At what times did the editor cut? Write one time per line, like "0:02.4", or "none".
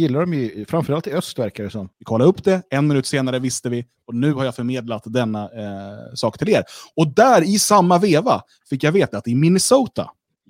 0:01.9